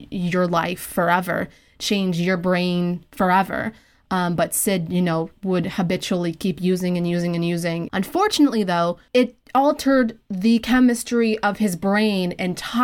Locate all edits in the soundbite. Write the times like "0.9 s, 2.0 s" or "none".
7.9 s